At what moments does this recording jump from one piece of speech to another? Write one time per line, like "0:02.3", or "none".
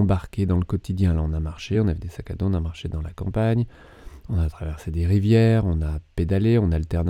none